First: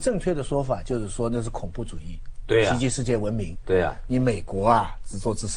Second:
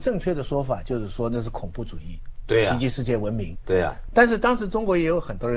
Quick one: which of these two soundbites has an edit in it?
first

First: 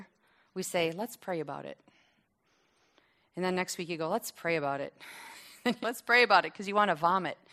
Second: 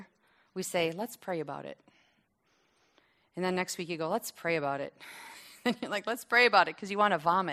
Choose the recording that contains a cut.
first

